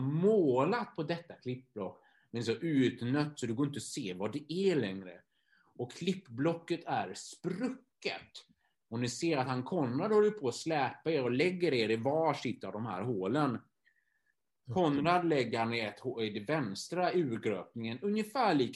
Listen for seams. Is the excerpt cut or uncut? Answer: cut